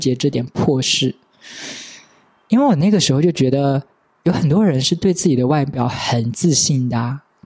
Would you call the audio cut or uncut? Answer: uncut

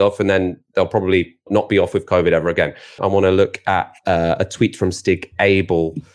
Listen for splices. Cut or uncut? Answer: cut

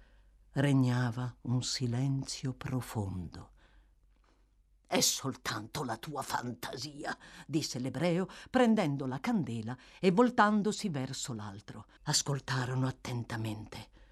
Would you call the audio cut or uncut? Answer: cut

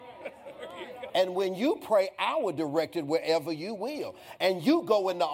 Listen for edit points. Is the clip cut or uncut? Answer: cut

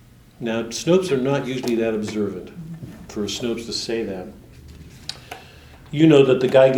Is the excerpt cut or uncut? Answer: uncut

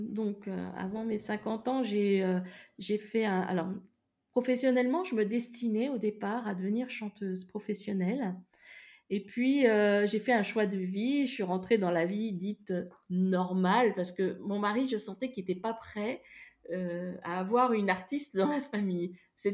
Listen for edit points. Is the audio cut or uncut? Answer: uncut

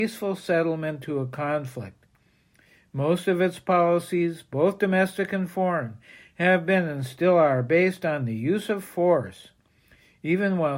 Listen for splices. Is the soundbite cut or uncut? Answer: uncut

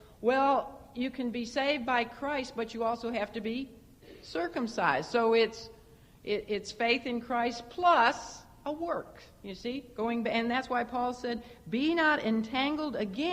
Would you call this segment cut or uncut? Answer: uncut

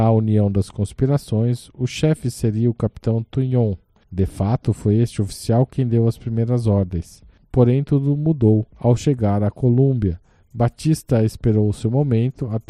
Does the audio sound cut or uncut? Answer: uncut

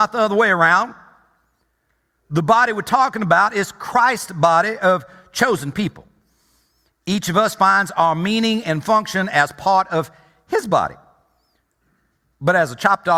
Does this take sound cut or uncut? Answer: uncut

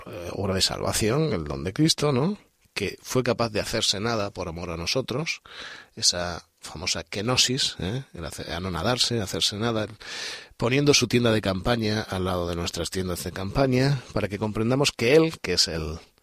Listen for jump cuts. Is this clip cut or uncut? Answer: uncut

